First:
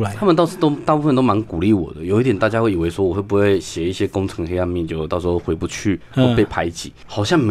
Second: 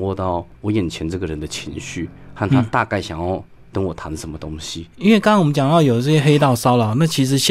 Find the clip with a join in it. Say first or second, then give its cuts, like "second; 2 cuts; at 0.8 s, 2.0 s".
second; 1 cut; at 4.9 s